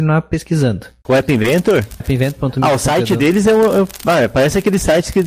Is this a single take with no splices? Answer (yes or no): no